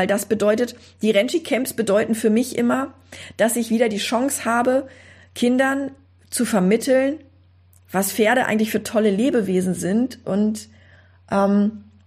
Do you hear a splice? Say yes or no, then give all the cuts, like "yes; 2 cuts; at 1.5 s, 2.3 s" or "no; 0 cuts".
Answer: no; 0 cuts